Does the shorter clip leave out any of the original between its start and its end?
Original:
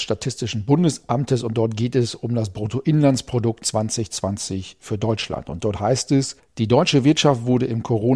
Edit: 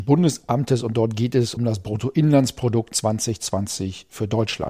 yes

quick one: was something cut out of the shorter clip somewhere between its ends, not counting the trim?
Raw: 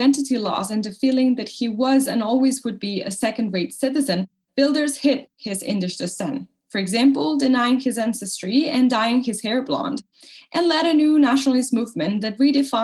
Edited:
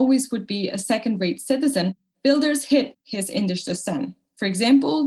no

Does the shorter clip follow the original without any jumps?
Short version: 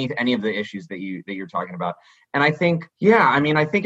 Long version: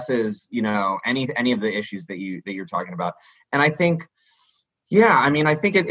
no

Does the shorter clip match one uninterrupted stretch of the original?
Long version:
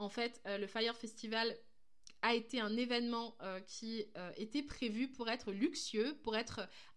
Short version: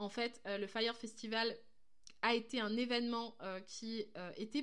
yes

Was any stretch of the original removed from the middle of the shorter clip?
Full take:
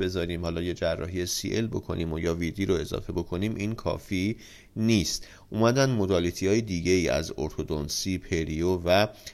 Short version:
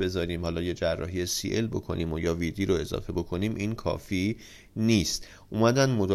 no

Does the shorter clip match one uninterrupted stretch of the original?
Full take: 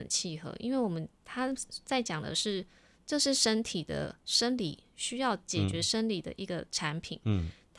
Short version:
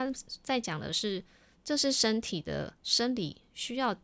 yes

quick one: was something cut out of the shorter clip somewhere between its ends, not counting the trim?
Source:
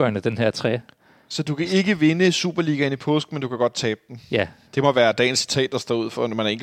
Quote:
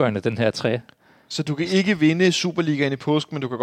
no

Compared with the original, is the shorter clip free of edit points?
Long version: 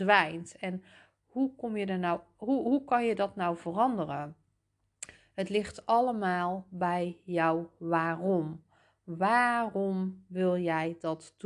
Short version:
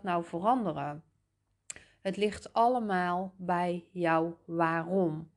yes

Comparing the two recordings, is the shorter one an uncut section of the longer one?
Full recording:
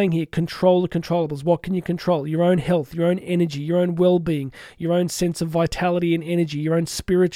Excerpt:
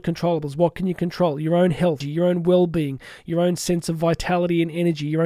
no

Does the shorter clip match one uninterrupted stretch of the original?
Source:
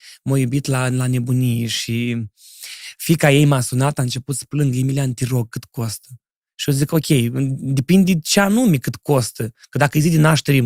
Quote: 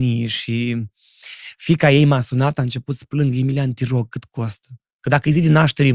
no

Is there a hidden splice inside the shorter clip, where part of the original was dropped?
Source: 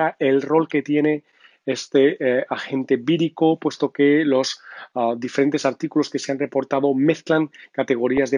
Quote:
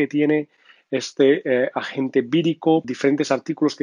yes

